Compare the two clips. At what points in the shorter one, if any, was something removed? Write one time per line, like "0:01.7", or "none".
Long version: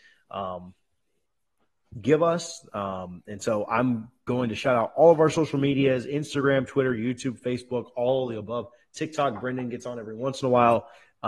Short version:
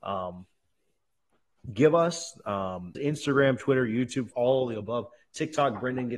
0:02.9
0:04.3

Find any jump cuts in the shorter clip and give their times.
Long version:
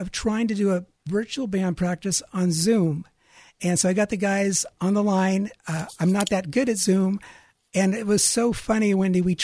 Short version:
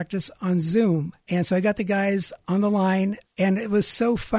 0:01.2
0:03.3

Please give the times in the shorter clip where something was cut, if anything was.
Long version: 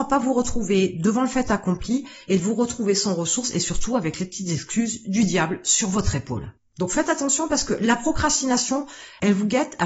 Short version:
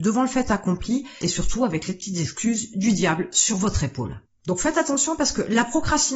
0:01.2

